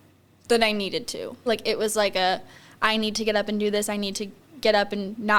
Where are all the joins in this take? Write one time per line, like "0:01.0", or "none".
0:01.5